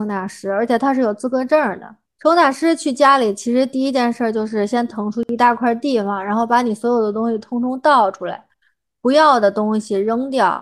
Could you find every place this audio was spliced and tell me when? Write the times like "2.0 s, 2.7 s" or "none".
2.1 s